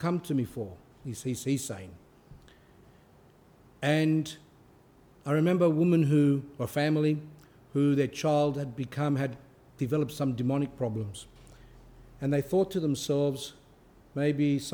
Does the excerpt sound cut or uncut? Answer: uncut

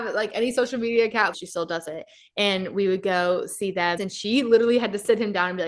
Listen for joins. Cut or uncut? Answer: cut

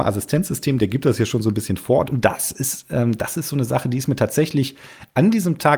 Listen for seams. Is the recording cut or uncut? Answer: cut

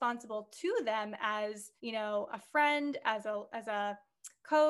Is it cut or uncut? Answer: cut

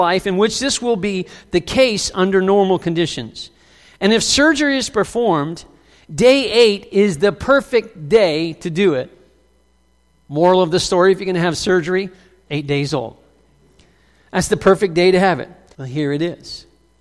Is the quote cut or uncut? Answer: cut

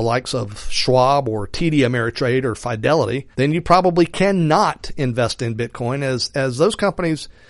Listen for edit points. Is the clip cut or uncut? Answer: cut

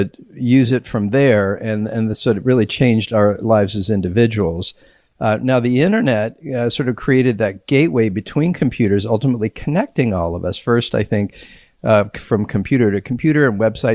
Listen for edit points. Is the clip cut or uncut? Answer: uncut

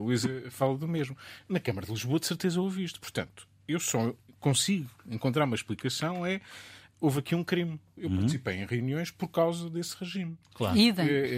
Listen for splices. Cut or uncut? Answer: cut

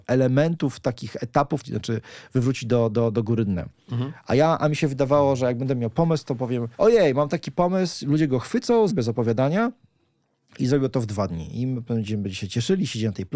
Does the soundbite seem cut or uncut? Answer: cut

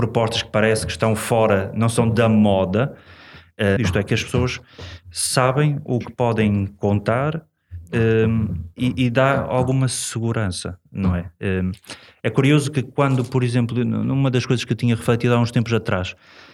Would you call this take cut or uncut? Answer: cut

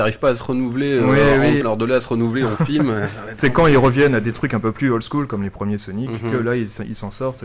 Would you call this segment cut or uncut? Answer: cut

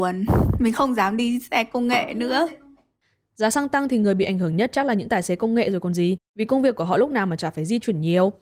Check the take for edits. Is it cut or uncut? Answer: uncut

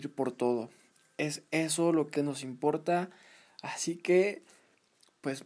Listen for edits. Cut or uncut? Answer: cut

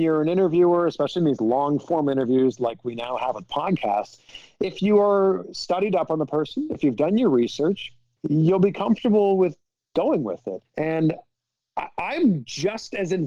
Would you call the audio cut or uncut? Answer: cut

